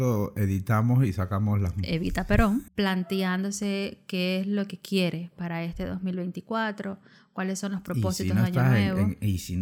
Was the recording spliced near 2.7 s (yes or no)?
yes